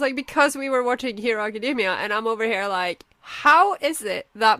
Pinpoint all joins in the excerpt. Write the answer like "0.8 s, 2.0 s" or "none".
3.1 s

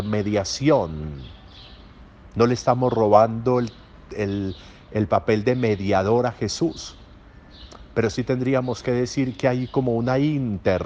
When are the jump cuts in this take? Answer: none

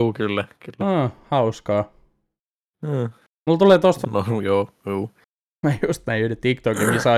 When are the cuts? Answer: 4.0 s

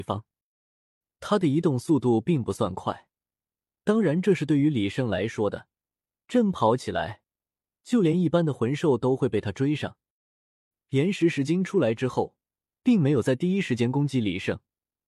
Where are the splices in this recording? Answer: none

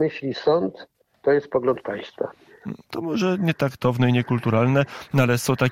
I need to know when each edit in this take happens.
2.9 s

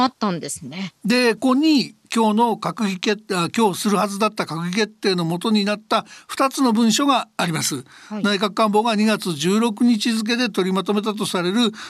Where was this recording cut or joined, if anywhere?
1.4 s

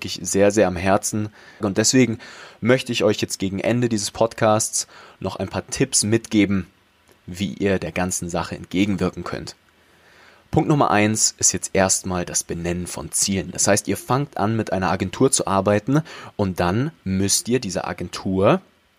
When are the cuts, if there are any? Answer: 1.6 s

